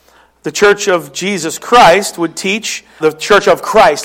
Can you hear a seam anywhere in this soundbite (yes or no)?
yes